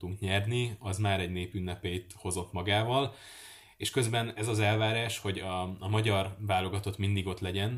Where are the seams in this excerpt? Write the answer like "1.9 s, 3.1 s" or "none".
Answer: none